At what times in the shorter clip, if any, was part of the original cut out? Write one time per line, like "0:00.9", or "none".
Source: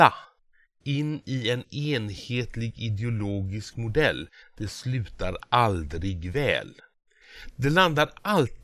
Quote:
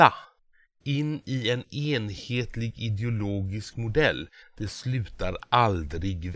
none